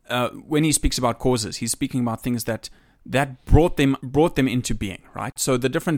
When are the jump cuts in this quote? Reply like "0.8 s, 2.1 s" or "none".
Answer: 4.0 s